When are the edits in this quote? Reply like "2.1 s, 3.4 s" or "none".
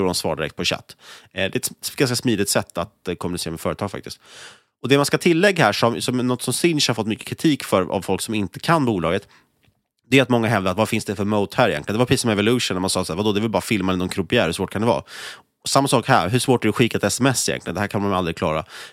none